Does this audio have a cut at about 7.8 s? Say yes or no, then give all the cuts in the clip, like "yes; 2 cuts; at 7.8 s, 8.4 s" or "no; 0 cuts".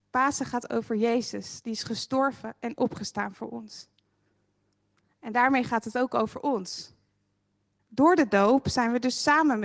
yes; 1 cut; at 7.8 s